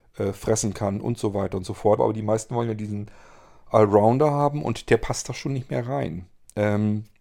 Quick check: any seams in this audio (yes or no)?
yes